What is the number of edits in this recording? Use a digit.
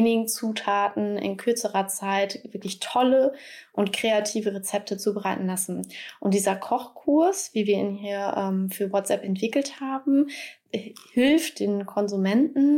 0